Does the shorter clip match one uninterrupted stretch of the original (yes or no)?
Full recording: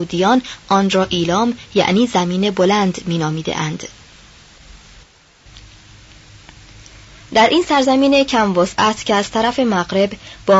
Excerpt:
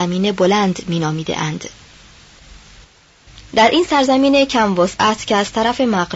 no